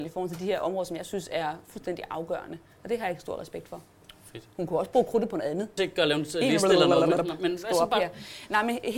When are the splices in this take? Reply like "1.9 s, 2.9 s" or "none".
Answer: 5.8 s